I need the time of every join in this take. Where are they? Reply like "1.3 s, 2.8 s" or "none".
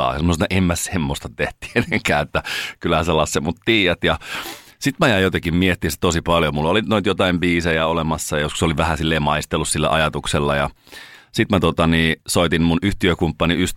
none